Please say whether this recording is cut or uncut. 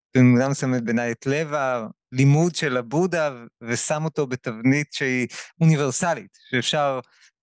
uncut